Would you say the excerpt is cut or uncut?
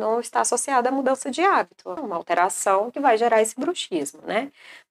cut